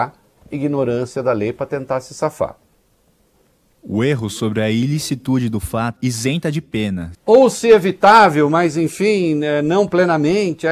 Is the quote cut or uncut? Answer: cut